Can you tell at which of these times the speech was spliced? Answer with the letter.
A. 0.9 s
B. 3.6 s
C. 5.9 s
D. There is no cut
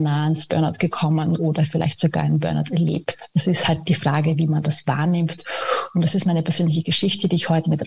D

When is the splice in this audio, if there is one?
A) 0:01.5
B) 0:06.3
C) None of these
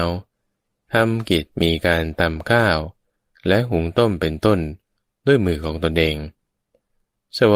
A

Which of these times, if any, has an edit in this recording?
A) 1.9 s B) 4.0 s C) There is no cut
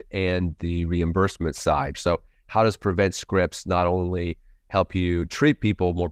A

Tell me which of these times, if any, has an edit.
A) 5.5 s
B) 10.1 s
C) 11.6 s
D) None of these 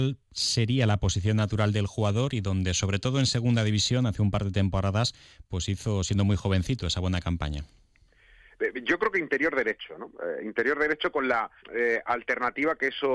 C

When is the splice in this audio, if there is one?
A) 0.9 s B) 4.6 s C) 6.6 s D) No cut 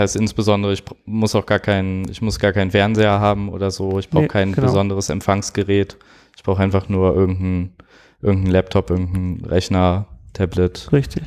D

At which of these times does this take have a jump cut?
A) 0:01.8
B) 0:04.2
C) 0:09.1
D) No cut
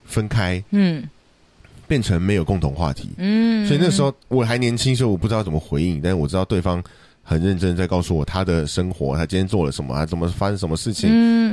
B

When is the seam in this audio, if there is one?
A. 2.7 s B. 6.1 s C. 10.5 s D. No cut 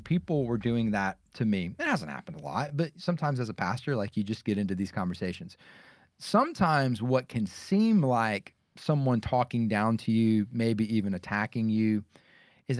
D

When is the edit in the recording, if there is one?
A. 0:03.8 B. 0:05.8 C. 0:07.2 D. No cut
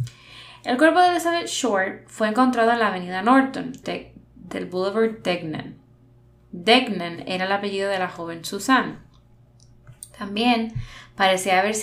A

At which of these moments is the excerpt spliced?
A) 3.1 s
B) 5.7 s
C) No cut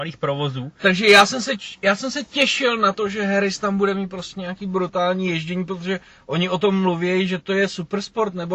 C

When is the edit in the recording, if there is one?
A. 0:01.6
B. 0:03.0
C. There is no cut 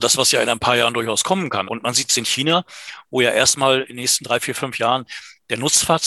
A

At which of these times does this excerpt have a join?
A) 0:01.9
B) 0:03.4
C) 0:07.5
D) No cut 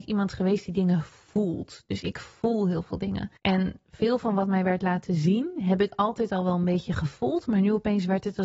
B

